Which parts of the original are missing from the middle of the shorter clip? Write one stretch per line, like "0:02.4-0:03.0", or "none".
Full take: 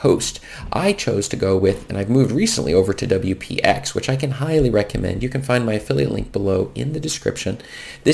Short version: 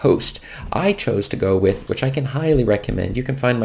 0:01.9-0:03.9